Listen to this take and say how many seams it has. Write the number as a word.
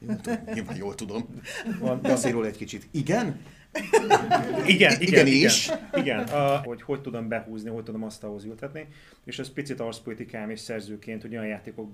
two